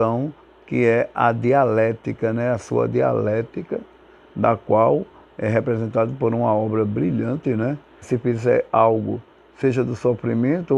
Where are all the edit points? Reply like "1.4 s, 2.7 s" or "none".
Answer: 8.0 s